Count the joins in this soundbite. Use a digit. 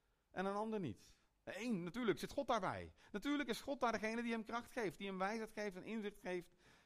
0